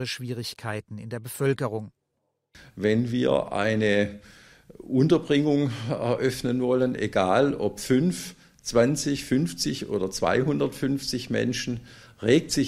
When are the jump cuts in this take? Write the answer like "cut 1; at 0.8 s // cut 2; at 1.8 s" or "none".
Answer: none